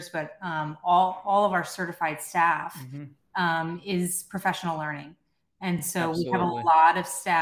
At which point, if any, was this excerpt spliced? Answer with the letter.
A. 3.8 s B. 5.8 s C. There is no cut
C